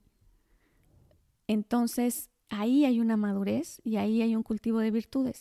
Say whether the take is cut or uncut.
uncut